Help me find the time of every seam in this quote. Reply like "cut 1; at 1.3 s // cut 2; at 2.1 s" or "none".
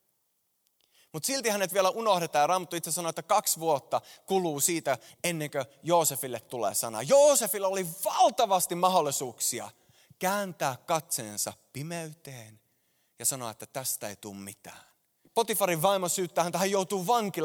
cut 1; at 5.1 s // cut 2; at 15.2 s

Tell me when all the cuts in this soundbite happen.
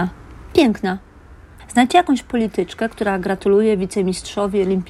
cut 1; at 1.6 s

